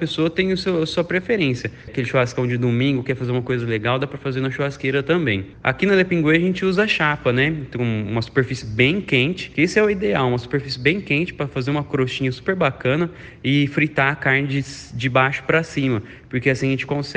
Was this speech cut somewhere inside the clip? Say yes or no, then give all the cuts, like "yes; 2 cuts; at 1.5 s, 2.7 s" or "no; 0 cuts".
yes; 1 cut; at 1.9 s